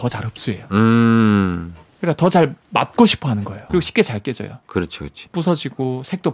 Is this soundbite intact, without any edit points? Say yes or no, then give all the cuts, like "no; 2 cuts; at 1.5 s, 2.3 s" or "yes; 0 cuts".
no; 2 cuts; at 3.7 s, 5.3 s